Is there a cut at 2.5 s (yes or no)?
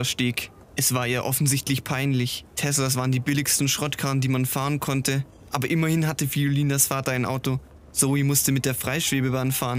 no